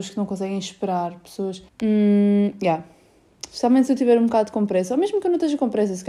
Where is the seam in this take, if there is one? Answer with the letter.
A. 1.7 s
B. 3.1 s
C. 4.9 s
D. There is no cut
A